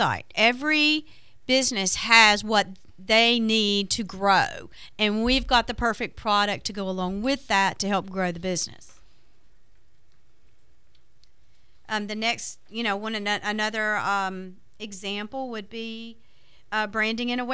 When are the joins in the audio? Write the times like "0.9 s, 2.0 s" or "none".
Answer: none